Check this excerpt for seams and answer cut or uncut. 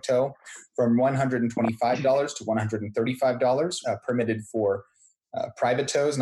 cut